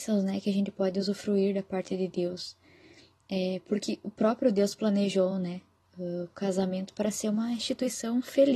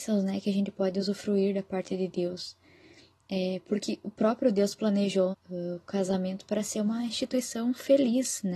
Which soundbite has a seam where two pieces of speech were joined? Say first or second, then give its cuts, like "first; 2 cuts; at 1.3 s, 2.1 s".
second; 1 cut; at 5.3 s